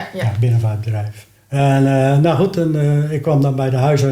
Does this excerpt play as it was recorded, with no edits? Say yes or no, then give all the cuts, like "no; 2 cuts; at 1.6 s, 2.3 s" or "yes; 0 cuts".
no; 1 cut; at 1.4 s